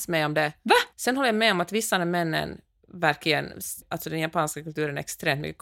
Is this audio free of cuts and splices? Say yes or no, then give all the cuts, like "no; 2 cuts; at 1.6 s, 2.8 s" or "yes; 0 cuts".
no; 2 cuts; at 0.9 s, 3.8 s